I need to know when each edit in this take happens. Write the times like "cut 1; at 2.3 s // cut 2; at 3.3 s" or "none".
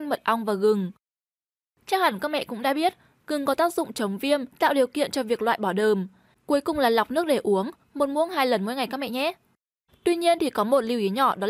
cut 1; at 4.5 s // cut 2; at 6.3 s